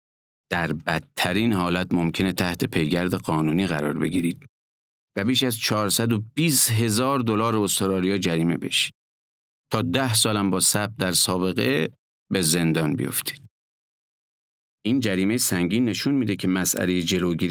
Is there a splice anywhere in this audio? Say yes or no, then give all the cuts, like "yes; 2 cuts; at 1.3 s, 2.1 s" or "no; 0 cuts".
no; 0 cuts